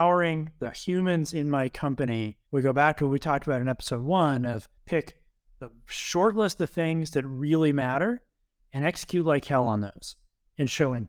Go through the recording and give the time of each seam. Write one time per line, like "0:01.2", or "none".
0:02.5
0:04.8